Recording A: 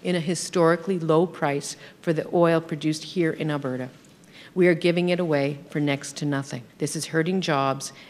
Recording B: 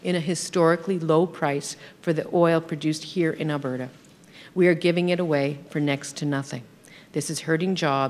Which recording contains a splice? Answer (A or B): A